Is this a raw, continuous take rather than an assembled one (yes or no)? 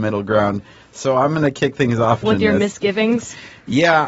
no